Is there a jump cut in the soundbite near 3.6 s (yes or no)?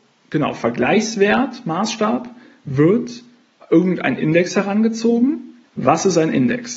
no